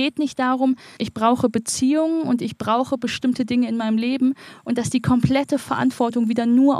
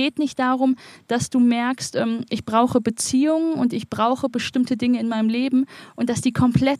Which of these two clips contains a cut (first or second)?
first